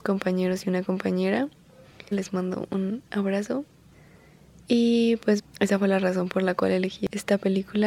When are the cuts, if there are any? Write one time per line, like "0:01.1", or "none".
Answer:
0:02.1
0:05.4